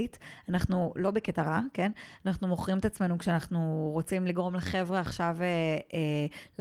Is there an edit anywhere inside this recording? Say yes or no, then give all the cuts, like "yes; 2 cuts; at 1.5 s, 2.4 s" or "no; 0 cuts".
no; 0 cuts